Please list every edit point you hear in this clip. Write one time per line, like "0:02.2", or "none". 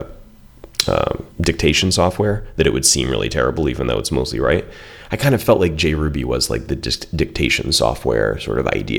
0:01.3